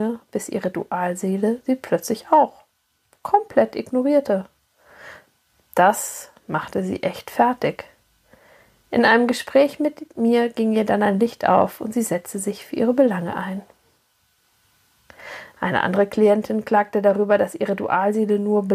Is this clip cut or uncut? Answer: uncut